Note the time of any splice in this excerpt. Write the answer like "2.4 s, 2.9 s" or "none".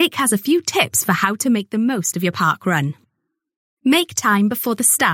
none